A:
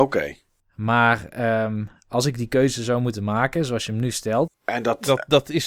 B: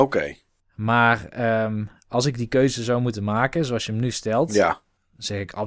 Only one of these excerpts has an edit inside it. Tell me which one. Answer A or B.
A